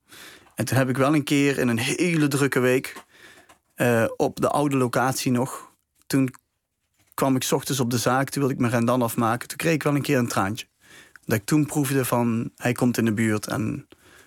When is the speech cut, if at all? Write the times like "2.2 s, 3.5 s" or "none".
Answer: none